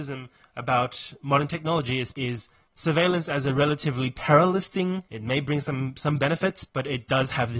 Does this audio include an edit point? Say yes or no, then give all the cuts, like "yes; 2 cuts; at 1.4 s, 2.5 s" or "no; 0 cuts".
yes; 1 cut; at 5.1 s